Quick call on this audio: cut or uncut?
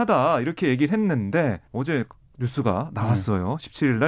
cut